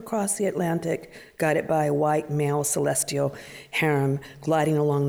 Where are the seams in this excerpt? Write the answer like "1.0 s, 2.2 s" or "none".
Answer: none